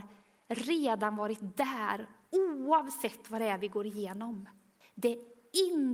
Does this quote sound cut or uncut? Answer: cut